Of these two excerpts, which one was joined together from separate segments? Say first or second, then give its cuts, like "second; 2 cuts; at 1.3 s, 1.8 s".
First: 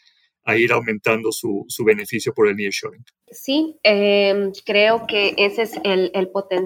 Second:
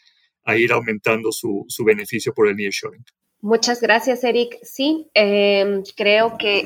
first; 1 cut; at 3.3 s